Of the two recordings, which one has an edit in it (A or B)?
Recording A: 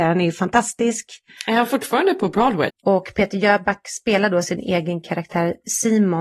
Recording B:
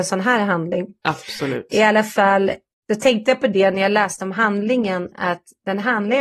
A